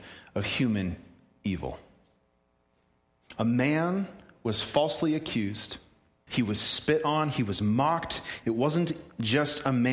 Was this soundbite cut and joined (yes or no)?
yes